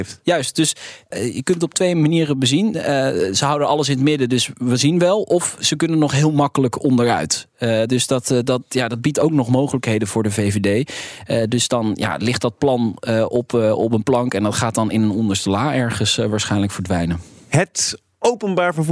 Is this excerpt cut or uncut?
uncut